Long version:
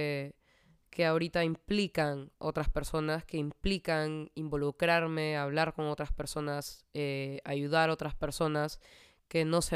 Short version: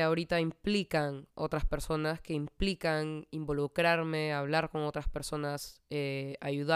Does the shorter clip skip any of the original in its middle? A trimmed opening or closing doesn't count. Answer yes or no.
no